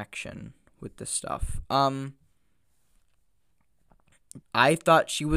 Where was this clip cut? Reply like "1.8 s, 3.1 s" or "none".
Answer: 4.4 s